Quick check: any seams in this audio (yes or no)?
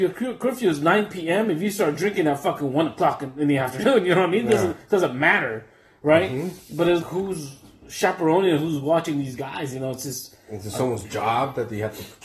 yes